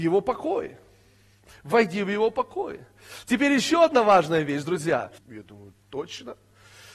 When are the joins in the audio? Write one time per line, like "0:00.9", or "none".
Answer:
0:05.2